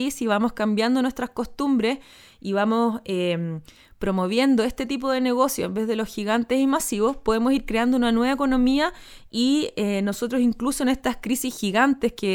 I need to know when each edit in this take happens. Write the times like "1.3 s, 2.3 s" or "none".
none